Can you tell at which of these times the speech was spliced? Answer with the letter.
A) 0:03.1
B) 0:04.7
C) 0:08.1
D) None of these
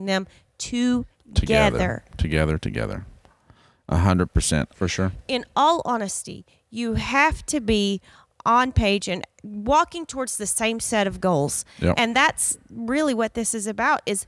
B